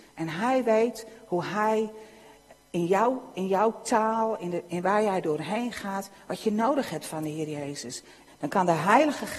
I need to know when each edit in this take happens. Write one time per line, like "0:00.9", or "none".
0:04.7
0:08.3